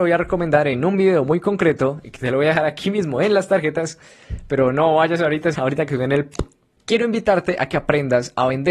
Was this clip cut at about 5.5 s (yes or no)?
yes